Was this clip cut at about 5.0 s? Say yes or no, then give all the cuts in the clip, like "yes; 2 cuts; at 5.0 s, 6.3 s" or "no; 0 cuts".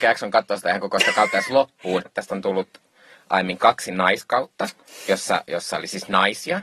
no; 1 cut; at 2.1 s